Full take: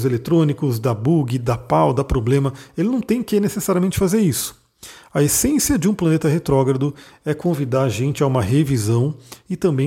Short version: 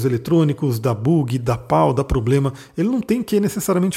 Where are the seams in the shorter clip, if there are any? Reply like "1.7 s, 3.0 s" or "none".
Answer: none